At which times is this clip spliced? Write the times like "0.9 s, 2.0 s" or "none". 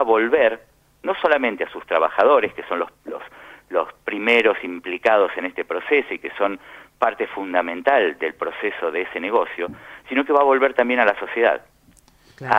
none